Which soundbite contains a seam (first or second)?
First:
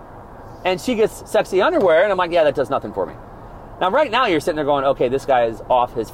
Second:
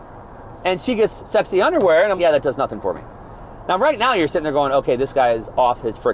second